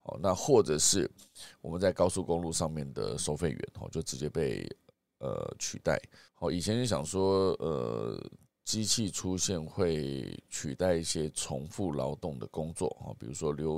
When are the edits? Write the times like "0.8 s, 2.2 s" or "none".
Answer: 6.3 s